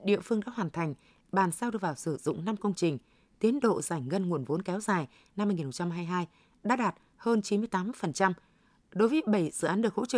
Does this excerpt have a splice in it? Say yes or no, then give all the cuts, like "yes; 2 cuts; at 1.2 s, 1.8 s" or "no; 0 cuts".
no; 0 cuts